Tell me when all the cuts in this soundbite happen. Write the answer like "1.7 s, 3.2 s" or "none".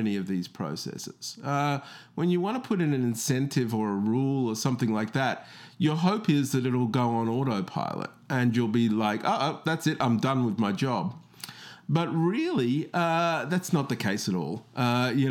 none